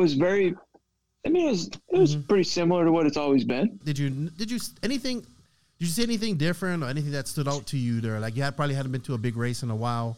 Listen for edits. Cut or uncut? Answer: cut